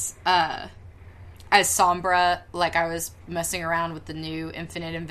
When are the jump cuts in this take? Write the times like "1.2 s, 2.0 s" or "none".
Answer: none